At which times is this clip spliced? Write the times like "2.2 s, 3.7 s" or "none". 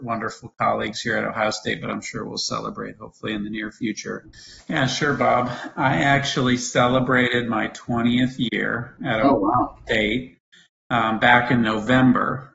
4.6 s

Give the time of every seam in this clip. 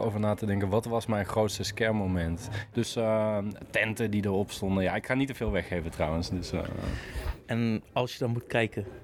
2.7 s

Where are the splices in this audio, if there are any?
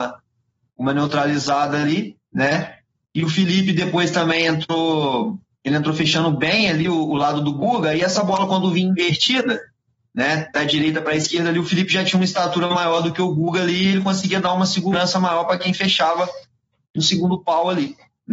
none

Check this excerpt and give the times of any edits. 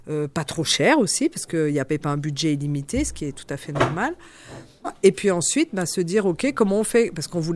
4.8 s

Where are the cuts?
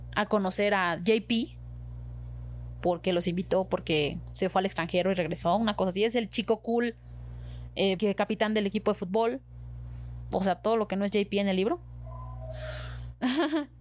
8.0 s, 10.3 s

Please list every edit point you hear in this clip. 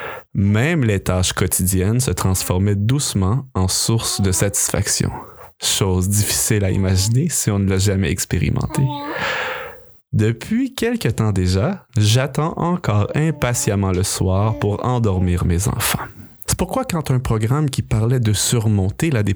11.9 s, 16.5 s

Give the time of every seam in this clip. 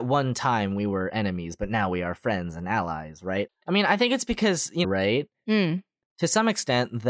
3.5 s, 4.8 s

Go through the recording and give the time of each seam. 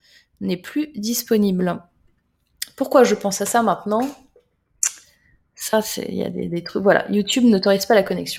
none

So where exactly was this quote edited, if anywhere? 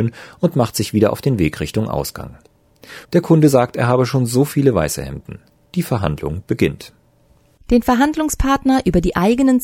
3.0 s

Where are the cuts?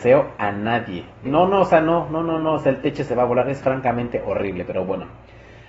1.3 s

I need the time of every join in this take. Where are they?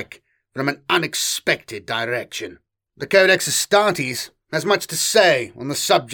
2.9 s

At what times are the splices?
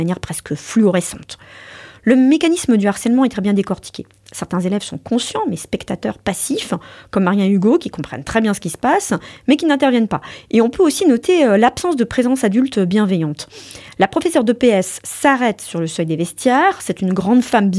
none

